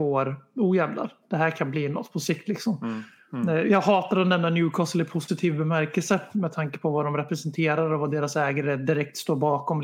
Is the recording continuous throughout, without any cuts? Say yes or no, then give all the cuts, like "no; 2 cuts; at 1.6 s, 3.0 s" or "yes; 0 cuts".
yes; 0 cuts